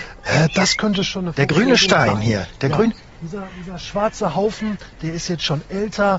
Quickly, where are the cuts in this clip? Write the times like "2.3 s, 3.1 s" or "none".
none